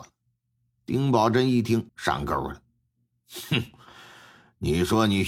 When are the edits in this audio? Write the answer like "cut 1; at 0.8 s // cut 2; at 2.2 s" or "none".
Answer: cut 1; at 1.9 s